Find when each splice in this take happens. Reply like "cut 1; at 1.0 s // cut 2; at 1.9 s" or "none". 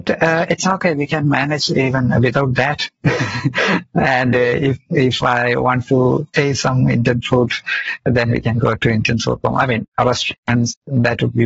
none